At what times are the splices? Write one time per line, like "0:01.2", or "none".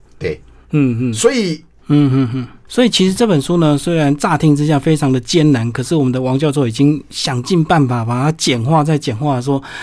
0:01.8